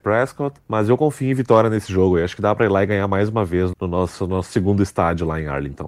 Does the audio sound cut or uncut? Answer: cut